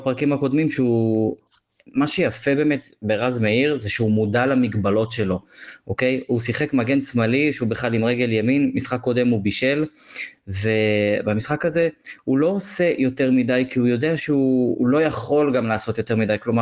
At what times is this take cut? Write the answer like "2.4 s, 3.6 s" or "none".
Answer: 14.7 s